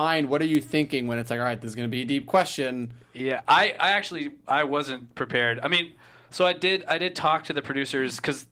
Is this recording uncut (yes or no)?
yes